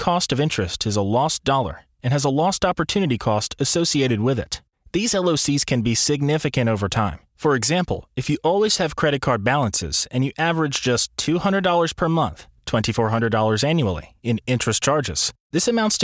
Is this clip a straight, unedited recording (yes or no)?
no